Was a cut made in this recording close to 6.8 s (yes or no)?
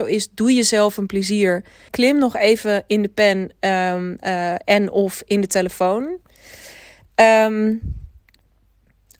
no